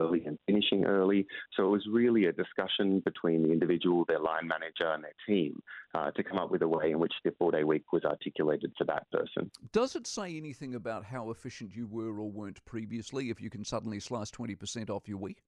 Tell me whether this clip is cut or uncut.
uncut